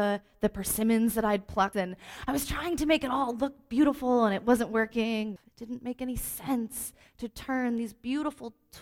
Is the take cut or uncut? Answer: cut